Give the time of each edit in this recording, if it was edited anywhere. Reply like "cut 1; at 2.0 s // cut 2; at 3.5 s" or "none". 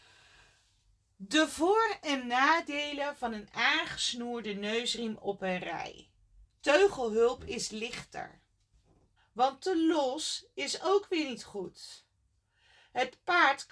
cut 1; at 6.4 s // cut 2; at 9.2 s